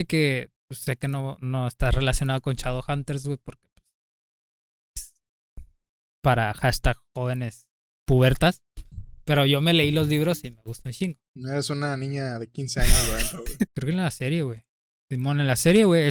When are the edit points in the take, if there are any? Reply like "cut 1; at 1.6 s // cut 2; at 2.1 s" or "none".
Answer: cut 1; at 11.2 s // cut 2; at 13.7 s